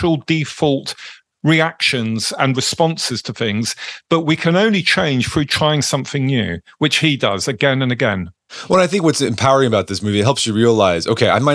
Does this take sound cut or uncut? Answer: uncut